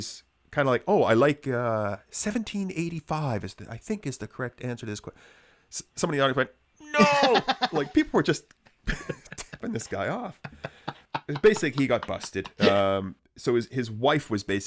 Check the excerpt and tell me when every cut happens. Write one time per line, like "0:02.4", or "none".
none

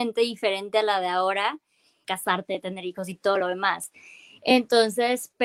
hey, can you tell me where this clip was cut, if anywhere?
0:02.0

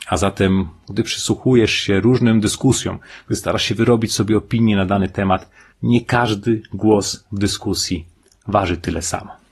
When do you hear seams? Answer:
0:05.7

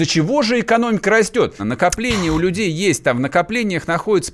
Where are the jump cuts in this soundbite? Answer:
0:01.6

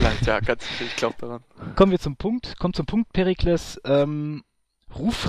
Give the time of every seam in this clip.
none

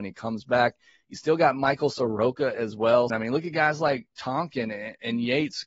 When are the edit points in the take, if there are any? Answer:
0:03.1

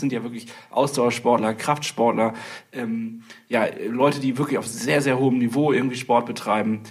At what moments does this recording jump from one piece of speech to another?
none

